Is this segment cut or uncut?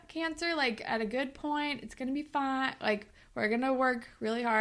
uncut